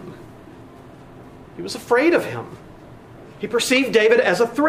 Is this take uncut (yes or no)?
yes